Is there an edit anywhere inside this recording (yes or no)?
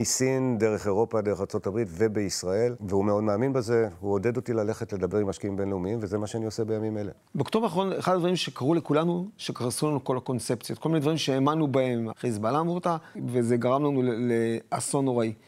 yes